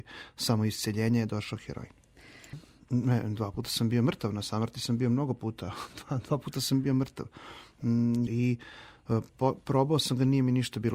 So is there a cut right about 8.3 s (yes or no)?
yes